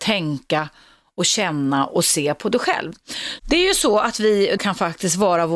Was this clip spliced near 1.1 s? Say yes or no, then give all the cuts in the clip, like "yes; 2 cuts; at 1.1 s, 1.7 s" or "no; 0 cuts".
no; 2 cuts; at 3.4 s, 4.6 s